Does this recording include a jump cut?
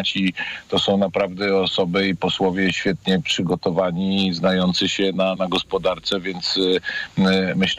yes; 1 cut; at 5.3 s

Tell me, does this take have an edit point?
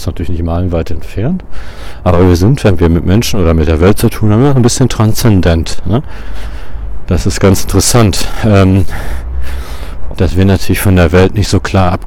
yes; 1 cut; at 10.1 s

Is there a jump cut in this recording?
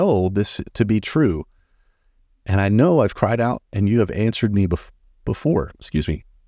no; 0 cuts

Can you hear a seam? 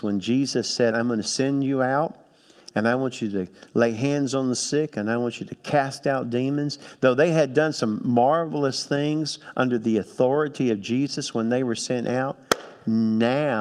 yes; 1 cut; at 0.9 s

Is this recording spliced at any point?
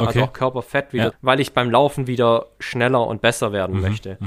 yes; 1 cut; at 1.1 s

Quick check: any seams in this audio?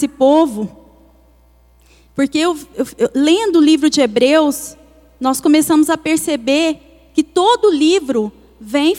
no; 0 cuts

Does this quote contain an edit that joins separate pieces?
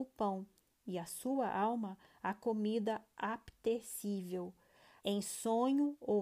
yes; 1 cut; at 5.0 s

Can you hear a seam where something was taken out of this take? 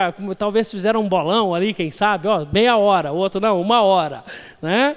no; 0 cuts

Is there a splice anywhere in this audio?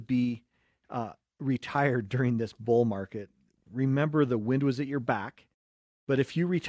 no; 0 cuts

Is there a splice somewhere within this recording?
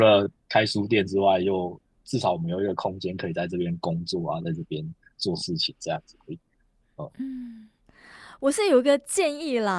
no; 0 cuts

